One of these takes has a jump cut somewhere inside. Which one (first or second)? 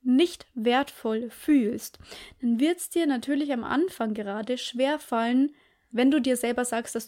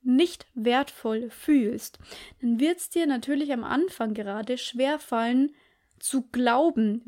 first